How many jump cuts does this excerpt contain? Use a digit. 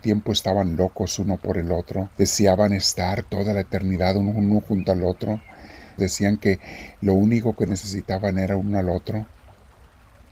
2